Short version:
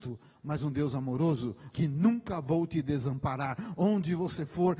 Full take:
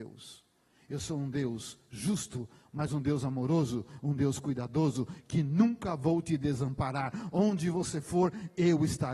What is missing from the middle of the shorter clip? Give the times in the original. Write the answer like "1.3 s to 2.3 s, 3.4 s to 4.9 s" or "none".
4.0 s to 5.3 s